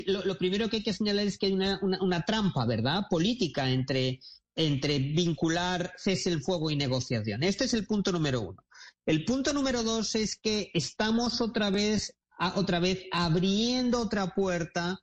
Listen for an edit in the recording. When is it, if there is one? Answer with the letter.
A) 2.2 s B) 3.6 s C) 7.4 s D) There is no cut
D